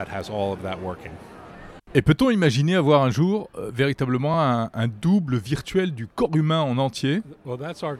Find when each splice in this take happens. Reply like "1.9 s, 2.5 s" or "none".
none